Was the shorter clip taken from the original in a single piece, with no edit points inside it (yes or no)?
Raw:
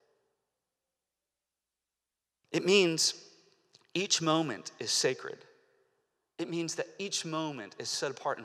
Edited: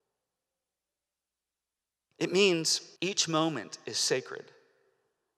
no